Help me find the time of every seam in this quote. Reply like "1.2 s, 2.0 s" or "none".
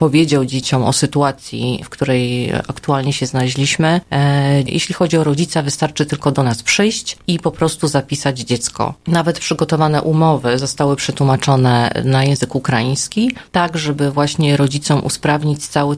4.7 s